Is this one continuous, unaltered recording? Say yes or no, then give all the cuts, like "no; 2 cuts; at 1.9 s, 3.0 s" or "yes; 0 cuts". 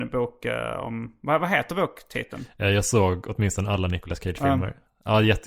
yes; 0 cuts